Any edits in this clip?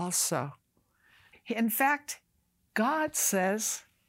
yes; 1 cut; at 1.3 s

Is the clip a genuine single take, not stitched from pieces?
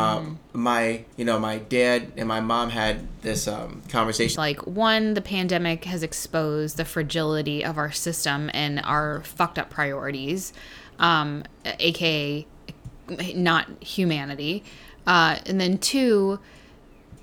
no; 2 cuts; at 1.1 s, 4.4 s

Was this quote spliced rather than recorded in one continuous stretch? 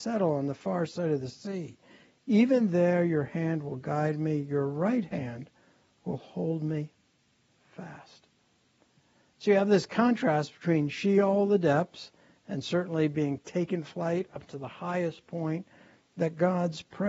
no; 0 cuts

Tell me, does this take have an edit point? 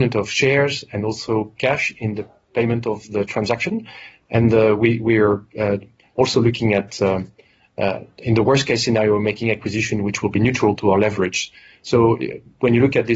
no; 0 cuts

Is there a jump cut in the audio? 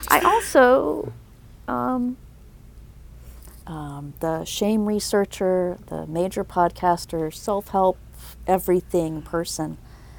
yes; 1 cut; at 3.6 s

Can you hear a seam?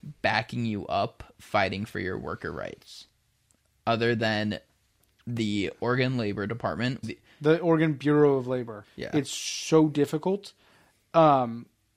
yes; 2 cuts; at 7.0 s, 8.8 s

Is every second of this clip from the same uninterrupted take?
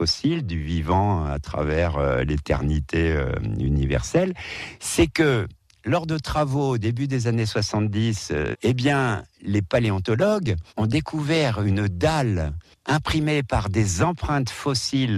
no; 2 cuts; at 8.5 s, 10.7 s

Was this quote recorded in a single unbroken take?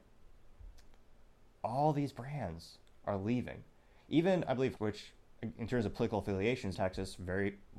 no; 2 cuts; at 4.8 s, 6.7 s

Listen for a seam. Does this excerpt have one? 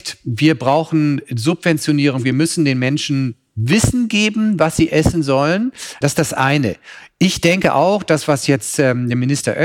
yes; 1 cut; at 6.0 s

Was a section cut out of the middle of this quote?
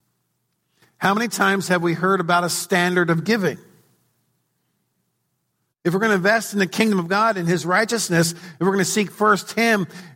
no; 0 cuts

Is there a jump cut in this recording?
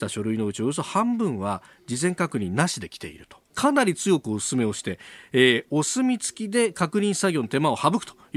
yes; 1 cut; at 3.5 s

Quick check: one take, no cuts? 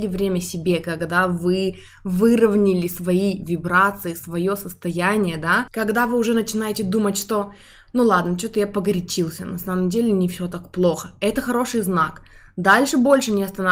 yes; 0 cuts

